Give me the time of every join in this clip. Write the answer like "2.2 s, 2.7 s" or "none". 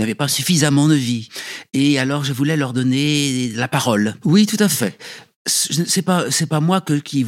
4.2 s